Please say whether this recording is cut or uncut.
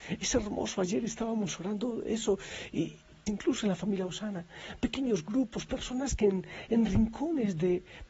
cut